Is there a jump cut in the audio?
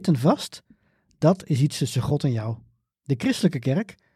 yes; 1 cut; at 2.9 s

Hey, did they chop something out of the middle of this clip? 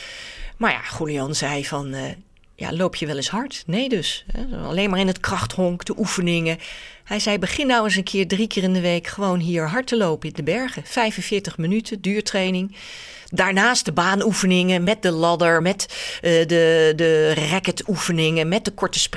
no; 0 cuts

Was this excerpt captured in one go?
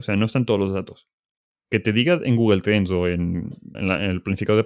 no; 1 cut; at 3.7 s

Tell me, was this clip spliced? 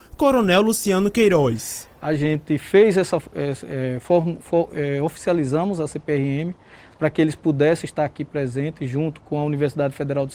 no; 0 cuts

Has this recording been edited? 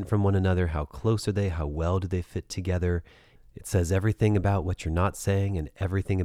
no; 0 cuts

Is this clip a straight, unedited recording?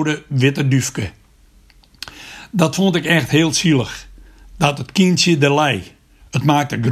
yes; 0 cuts

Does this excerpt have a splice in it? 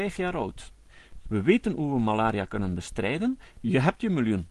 yes; 2 cuts; at 1.2 s, 3.5 s

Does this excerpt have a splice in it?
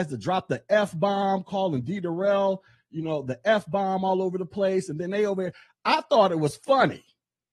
no; 0 cuts

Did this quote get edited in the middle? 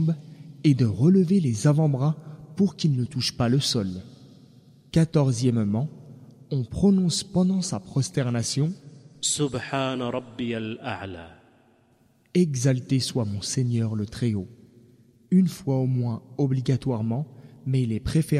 no; 0 cuts

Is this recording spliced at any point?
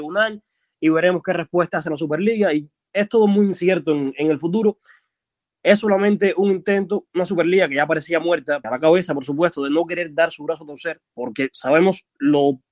yes; 2 cuts; at 8.6 s, 11.1 s

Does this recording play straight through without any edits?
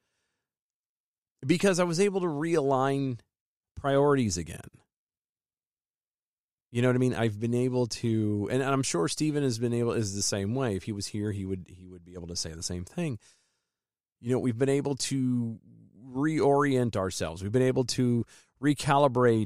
yes; 0 cuts

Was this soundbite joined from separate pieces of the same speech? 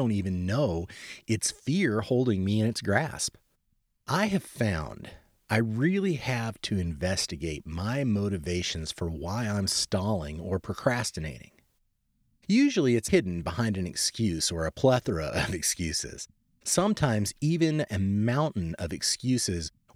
no; 0 cuts

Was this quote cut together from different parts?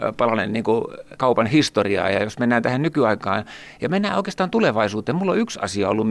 no; 0 cuts

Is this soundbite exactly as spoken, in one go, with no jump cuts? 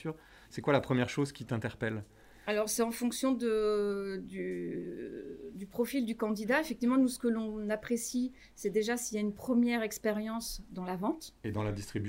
yes; 0 cuts

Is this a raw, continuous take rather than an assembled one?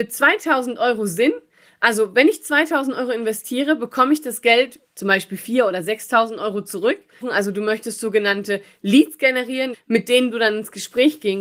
no; 2 cuts; at 7.2 s, 9.7 s

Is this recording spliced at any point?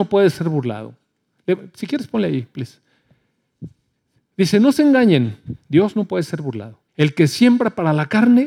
yes; 1 cut; at 6.9 s

